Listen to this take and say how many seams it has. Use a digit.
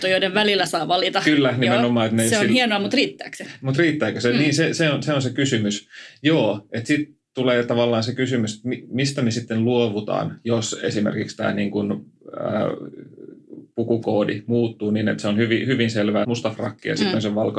1